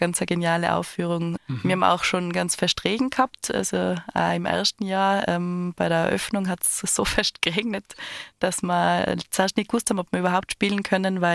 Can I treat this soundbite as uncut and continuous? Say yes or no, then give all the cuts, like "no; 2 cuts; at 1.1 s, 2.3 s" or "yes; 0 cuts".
no; 1 cut; at 1.4 s